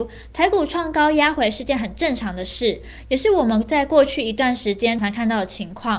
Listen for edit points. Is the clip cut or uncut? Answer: cut